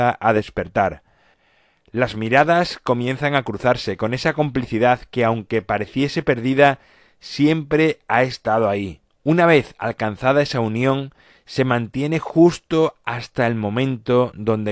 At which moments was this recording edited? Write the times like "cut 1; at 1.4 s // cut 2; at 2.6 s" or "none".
cut 1; at 9.2 s